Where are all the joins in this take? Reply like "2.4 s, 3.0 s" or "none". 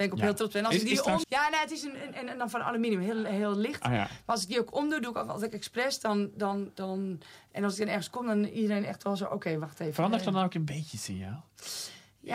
1.2 s